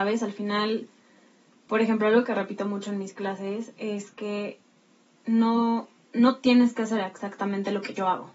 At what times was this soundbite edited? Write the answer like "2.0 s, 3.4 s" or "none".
none